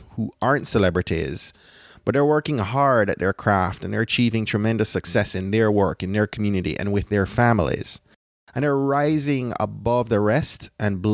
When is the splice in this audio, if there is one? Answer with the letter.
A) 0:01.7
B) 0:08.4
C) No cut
C